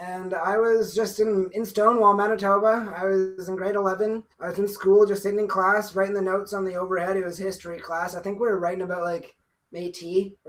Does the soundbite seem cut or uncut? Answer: cut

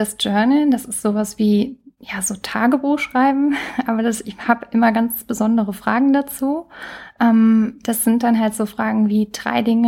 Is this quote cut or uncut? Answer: uncut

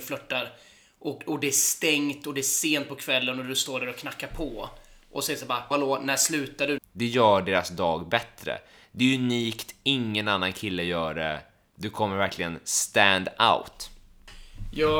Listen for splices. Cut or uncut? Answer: cut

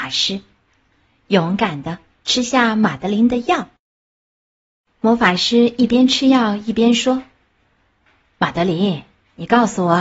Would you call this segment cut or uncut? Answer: uncut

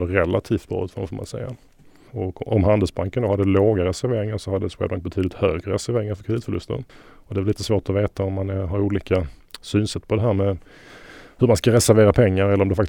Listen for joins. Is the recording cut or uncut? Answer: cut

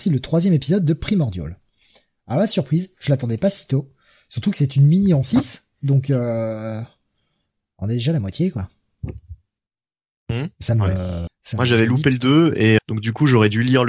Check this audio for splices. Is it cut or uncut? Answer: cut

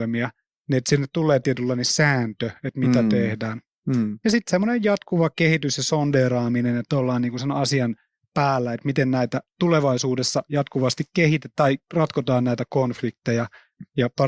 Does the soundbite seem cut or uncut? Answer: uncut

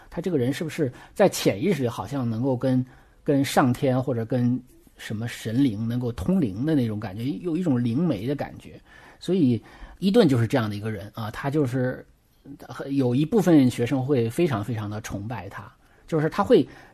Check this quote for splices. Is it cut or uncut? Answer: uncut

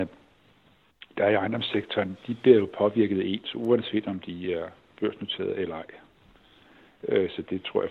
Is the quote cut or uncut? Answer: uncut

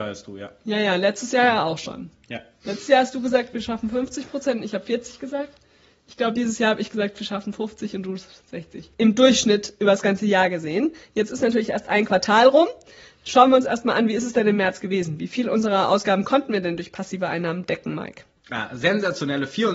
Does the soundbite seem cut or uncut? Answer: uncut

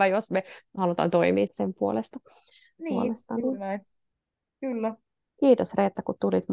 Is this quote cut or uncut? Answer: cut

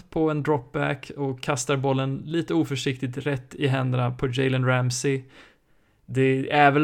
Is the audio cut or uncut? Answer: uncut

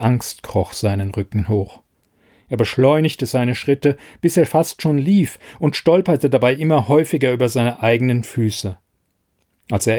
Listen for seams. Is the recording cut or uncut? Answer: uncut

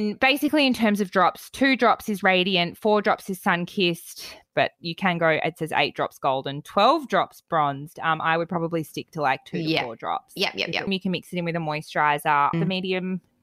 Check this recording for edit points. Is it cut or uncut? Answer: cut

